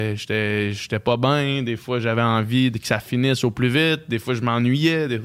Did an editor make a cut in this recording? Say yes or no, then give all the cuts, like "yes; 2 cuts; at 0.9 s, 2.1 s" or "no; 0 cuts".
no; 0 cuts